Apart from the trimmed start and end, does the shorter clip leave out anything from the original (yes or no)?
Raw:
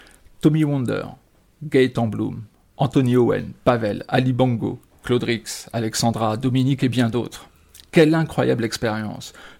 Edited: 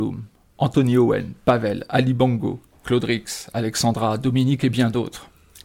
no